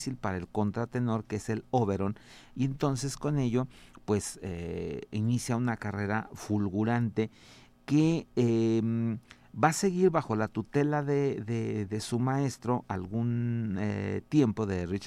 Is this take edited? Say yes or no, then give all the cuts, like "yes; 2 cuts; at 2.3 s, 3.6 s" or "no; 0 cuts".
no; 0 cuts